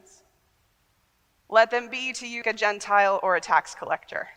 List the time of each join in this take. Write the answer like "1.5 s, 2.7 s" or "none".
1.4 s, 2.4 s